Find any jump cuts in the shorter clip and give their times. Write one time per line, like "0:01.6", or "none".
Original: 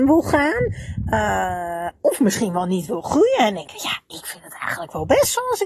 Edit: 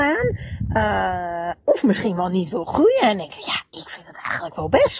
none